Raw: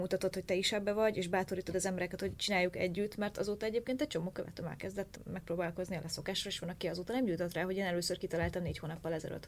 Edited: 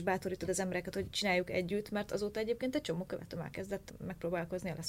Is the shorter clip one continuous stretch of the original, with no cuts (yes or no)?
yes